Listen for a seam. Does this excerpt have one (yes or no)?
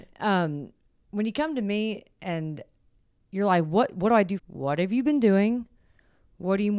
yes